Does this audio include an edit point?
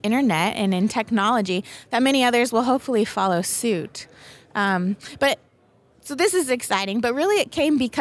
no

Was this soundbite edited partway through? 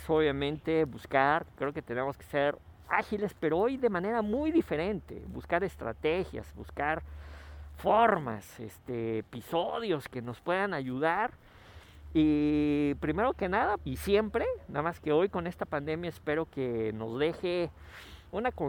yes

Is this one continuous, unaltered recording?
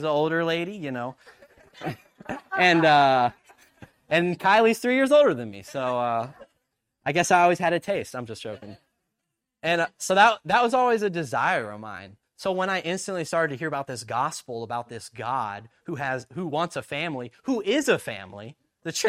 yes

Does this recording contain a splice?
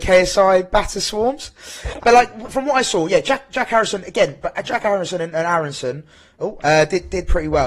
yes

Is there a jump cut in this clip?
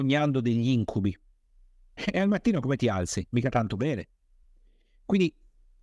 no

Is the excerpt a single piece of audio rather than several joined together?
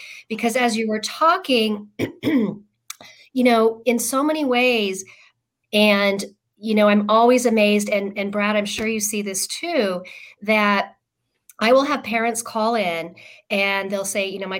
no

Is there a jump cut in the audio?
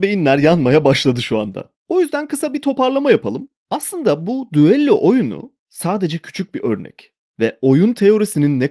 no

